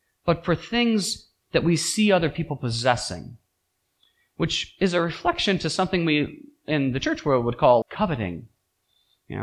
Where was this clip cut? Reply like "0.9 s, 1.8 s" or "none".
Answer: 7.8 s